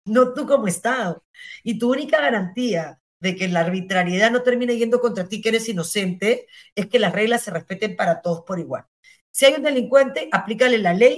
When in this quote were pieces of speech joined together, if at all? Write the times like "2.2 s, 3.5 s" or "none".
none